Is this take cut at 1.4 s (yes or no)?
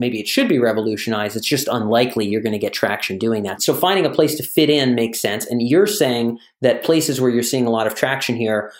no